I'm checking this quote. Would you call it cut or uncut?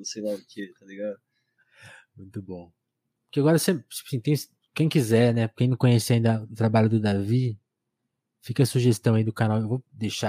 cut